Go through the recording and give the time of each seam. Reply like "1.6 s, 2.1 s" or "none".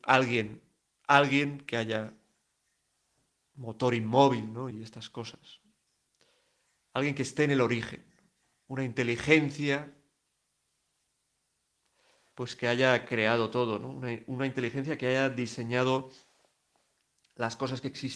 none